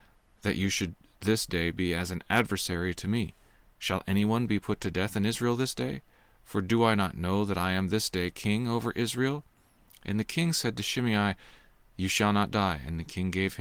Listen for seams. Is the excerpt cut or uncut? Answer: uncut